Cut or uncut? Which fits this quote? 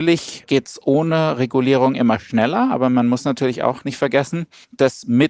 uncut